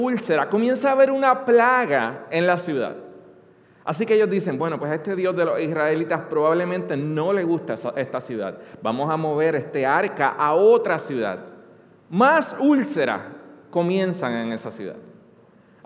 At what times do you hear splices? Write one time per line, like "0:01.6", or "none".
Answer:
none

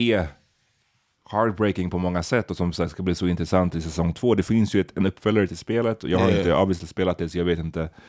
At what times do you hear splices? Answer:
none

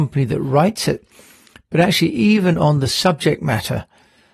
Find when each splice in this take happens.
none

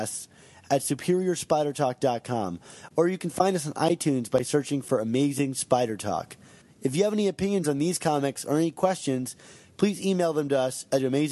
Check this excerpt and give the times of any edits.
0:06.6

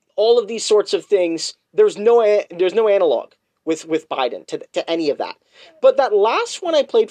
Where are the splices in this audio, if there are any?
none

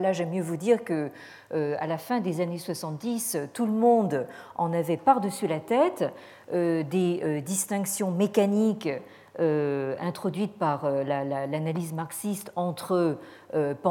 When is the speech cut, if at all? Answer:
none

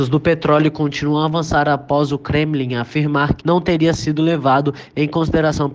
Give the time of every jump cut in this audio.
0:03.4

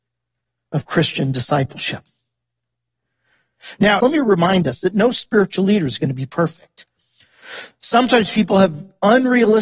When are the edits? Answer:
0:04.0

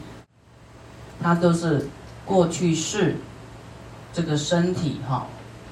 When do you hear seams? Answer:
0:01.1

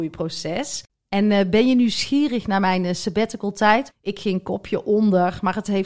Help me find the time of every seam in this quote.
0:03.9

